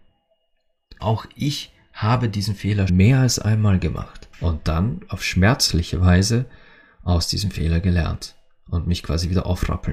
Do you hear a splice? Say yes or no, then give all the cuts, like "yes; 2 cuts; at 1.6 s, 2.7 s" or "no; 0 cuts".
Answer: yes; 3 cuts; at 1.0 s, 2.9 s, 4.3 s